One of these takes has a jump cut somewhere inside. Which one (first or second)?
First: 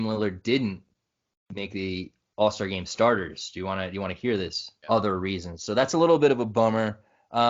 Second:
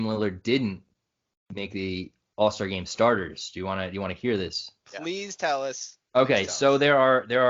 first